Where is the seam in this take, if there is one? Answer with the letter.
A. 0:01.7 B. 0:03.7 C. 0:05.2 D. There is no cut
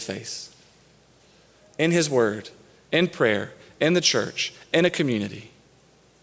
D